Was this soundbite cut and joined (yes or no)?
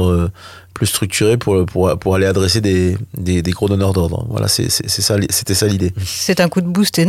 no